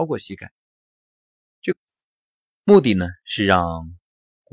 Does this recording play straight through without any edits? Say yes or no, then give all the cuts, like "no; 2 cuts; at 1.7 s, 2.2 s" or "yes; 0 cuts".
yes; 0 cuts